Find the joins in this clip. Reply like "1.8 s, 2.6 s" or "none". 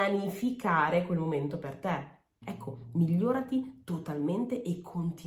2.4 s